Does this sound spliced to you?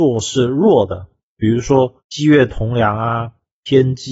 yes; 1 cut; at 2.0 s

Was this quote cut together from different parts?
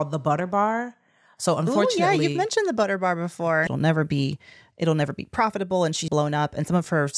yes; 2 cuts; at 3.7 s, 6.1 s

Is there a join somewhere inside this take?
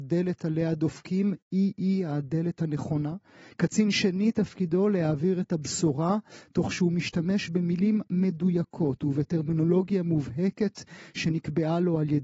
no; 0 cuts

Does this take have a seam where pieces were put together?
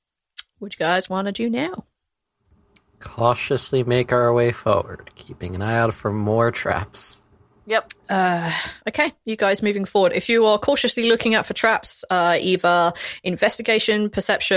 no; 0 cuts

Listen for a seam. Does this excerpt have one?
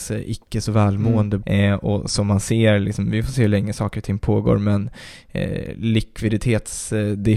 yes; 1 cut; at 1.4 s

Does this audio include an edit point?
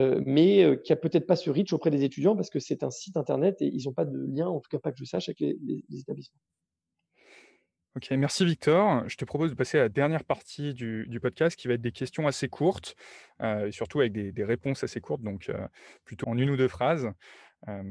yes; 1 cut; at 16.2 s

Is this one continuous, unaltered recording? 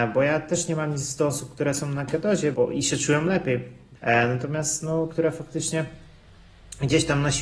no; 3 cuts; at 2.5 s, 4.0 s, 5.1 s

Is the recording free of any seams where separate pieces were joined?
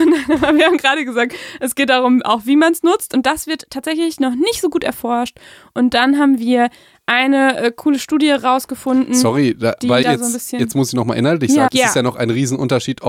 no; 2 cuts; at 10.0 s, 11.7 s

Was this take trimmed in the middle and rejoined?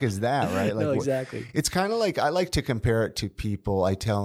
no; 0 cuts

